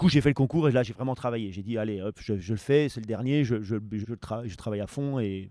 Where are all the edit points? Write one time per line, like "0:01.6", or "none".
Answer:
0:04.0